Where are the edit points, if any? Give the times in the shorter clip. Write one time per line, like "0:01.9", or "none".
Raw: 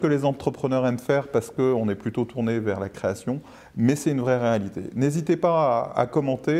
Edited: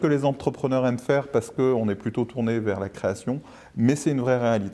none